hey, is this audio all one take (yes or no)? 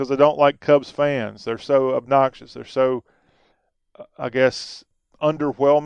yes